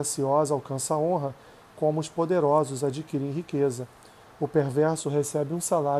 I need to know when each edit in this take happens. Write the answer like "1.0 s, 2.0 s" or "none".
4.3 s